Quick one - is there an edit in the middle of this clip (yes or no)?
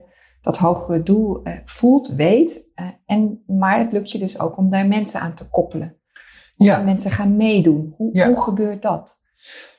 no